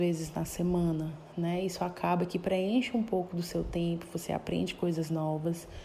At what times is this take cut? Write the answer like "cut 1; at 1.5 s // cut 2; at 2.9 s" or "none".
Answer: none

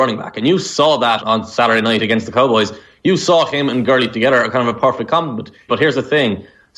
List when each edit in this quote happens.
cut 1; at 1.2 s // cut 2; at 5.7 s

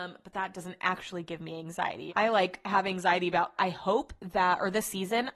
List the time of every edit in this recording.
cut 1; at 2.1 s // cut 2; at 3.6 s

